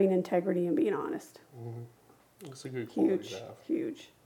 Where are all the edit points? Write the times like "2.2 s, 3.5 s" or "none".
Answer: none

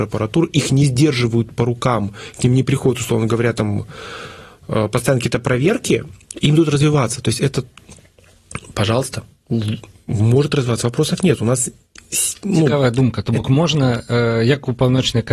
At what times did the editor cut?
none

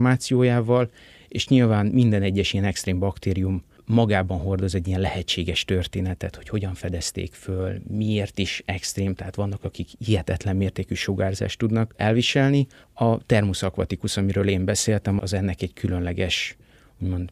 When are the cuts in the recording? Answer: 15.2 s

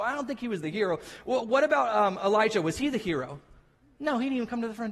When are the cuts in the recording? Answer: none

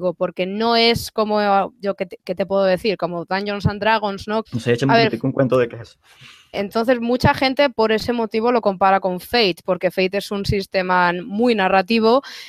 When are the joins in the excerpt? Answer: 4.4 s, 6.5 s, 9.6 s

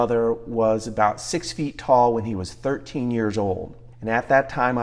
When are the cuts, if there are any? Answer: 3.9 s

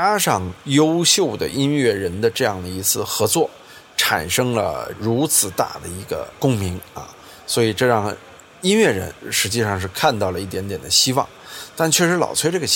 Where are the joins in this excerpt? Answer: none

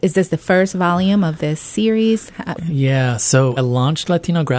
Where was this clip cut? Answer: 2.6 s, 3.6 s

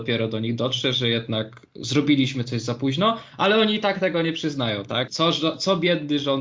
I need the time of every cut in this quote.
5.1 s

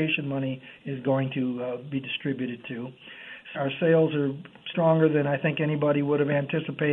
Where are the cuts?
3.5 s, 4.7 s

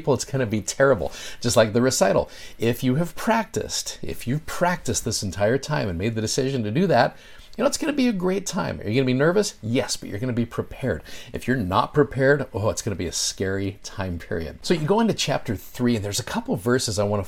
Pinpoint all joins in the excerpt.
none

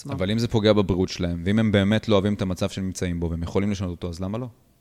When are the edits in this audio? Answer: none

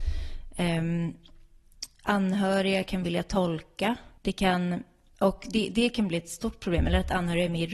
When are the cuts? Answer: 4.2 s

